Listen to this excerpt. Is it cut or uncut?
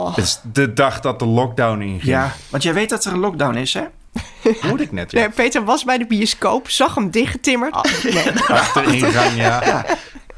cut